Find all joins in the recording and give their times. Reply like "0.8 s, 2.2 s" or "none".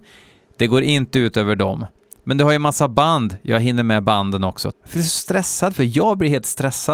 4.7 s